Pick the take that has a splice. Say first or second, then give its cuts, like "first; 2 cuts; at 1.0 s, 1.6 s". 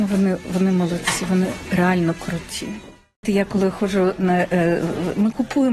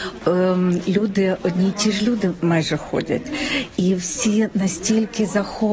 first; 1 cut; at 3.2 s